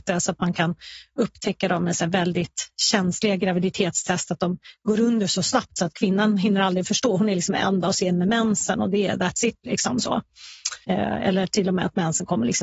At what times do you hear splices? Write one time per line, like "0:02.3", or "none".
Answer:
0:10.8